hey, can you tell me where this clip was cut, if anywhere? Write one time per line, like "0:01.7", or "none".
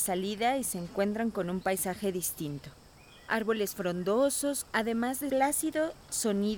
0:04.6